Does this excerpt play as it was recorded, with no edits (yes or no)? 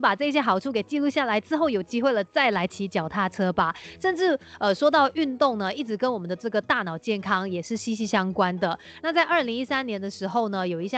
yes